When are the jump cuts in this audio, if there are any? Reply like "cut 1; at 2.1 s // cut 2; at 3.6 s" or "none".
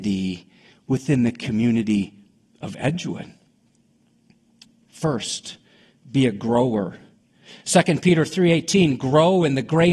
none